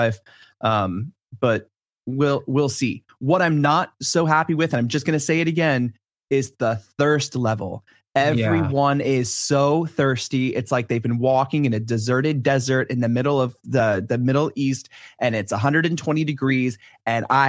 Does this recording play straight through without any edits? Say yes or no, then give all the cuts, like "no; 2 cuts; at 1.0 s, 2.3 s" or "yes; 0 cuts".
yes; 0 cuts